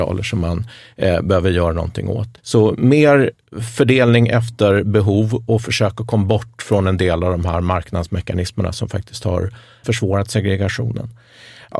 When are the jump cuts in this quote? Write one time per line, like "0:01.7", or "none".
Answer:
0:02.4
0:09.8